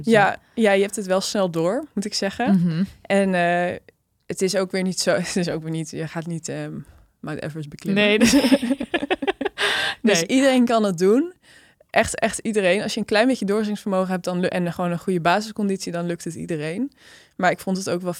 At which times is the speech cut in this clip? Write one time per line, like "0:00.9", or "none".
none